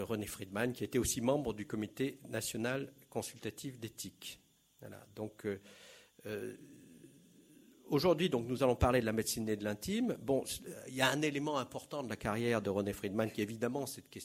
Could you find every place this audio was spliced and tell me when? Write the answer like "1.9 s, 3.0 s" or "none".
none